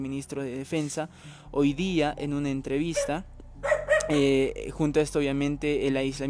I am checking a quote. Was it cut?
no; 0 cuts

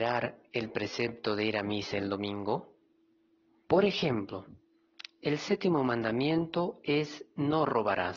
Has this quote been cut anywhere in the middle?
yes; 1 cut; at 3.6 s

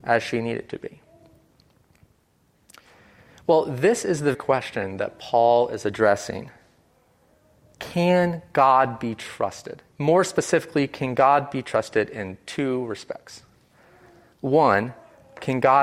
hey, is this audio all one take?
no; 2 cuts; at 4.3 s, 9.9 s

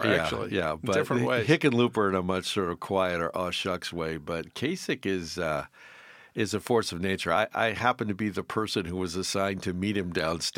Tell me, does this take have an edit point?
no; 0 cuts

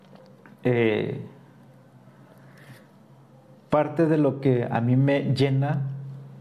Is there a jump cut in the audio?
no; 0 cuts

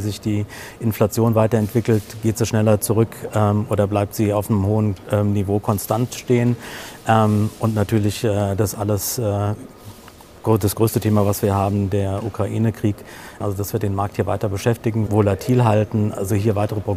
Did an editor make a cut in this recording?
yes; 2 cuts; at 13.4 s, 15.1 s

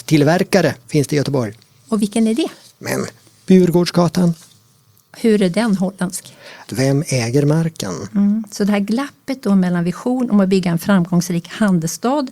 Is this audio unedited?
no; 1 cut; at 6.7 s

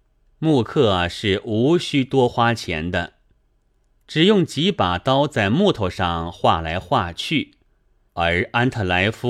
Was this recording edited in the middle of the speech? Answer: yes; 1 cut; at 8.1 s

